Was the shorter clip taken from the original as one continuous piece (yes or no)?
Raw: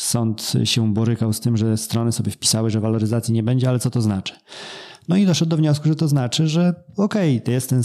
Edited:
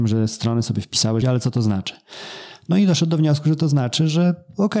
no